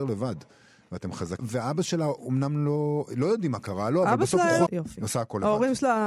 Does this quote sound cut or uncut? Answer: cut